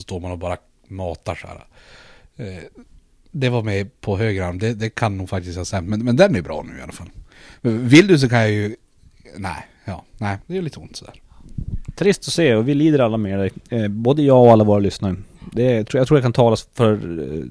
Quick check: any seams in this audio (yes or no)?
yes